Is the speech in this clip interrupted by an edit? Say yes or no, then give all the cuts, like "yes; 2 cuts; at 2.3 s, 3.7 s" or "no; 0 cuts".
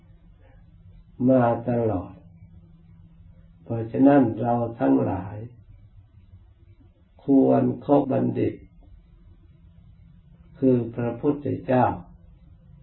yes; 1 cut; at 8.0 s